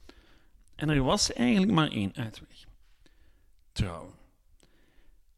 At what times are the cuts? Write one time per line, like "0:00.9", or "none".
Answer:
none